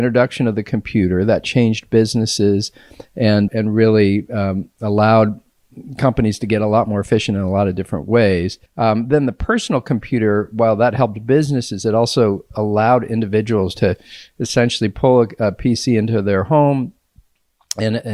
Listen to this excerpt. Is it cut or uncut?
cut